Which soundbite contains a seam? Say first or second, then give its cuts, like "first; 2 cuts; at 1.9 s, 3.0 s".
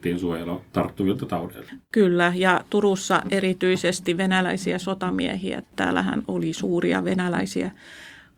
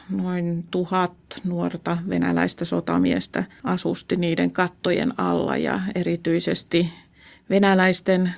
first; 1 cut; at 6.2 s